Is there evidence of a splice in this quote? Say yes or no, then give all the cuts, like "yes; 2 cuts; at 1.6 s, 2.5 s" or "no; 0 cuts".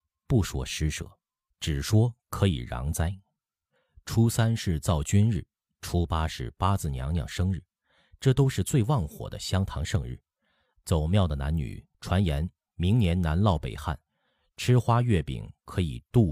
yes; 1 cut; at 11.9 s